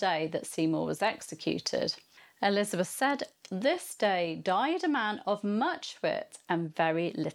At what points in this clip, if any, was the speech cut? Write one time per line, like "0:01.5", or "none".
none